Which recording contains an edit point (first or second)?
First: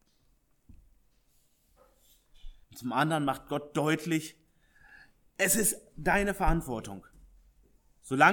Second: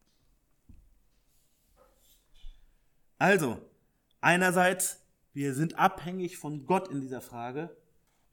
first